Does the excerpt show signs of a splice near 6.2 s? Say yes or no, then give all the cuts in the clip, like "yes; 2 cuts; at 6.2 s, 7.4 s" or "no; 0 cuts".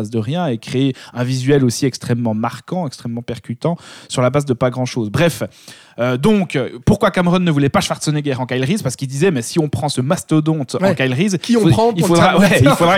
no; 0 cuts